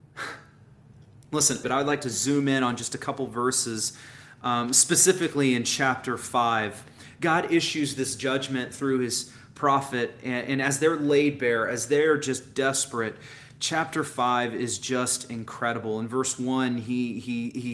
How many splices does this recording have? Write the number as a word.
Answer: one